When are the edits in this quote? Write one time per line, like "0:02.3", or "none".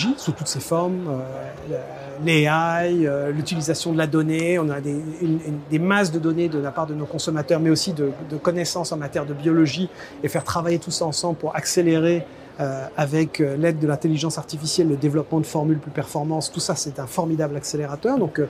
none